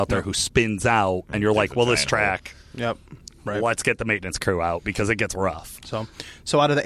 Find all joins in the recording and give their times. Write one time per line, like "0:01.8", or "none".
none

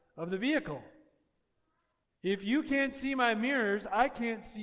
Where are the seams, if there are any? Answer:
0:02.0

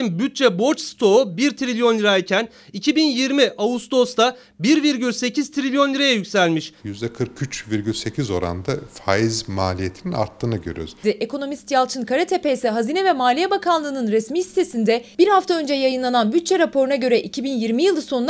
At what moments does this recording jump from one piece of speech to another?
0:06.8
0:11.0

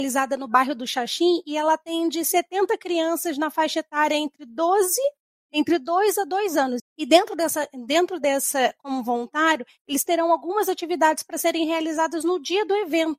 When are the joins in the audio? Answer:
0:06.8

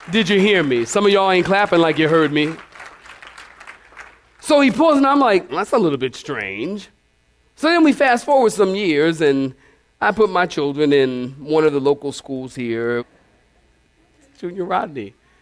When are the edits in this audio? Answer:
0:05.5
0:13.0

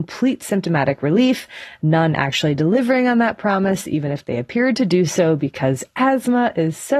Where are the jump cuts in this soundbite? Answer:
none

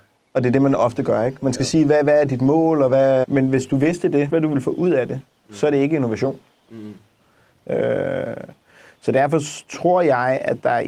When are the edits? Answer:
0:03.2
0:04.3

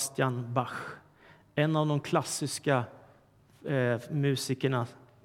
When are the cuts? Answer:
none

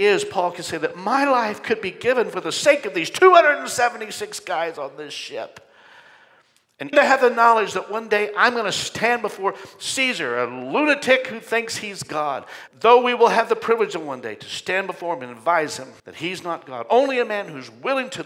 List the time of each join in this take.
0:06.9
0:12.7
0:16.0

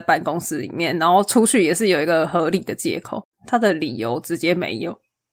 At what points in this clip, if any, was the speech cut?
0:03.3

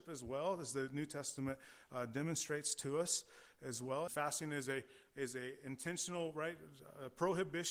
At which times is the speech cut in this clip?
0:04.1

